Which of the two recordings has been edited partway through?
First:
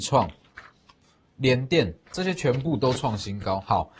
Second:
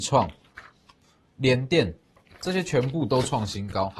first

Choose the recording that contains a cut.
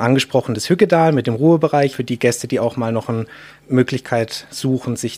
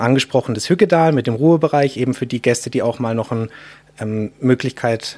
first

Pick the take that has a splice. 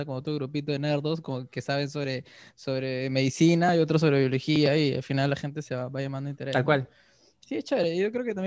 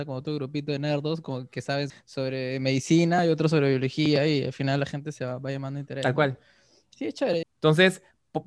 second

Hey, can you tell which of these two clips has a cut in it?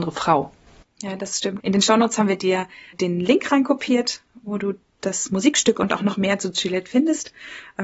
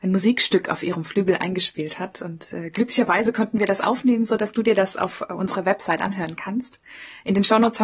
first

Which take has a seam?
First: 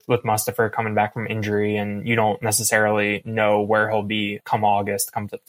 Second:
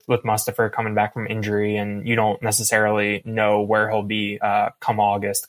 first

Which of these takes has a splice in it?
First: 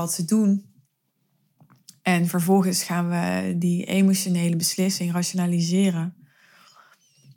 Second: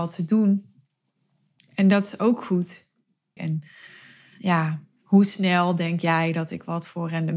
second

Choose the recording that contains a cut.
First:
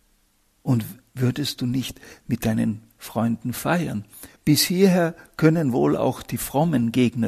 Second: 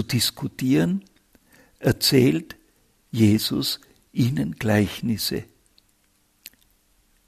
first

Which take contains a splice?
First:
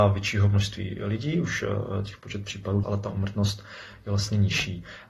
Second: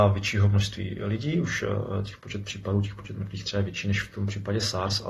first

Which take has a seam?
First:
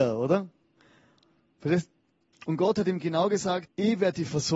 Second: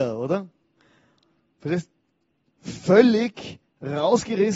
first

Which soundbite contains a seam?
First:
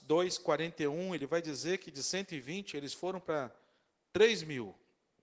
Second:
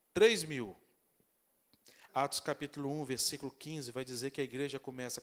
second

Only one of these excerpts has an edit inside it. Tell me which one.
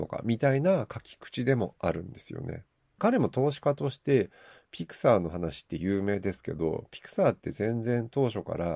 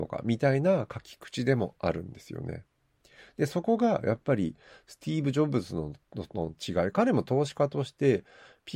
first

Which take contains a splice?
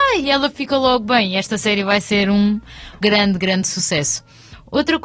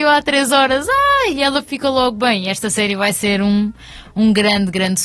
first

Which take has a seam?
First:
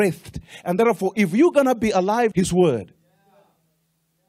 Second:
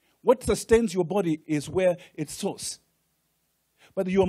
first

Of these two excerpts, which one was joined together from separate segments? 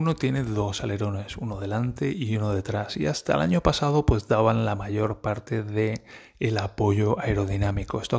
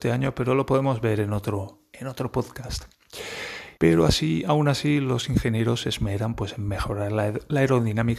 second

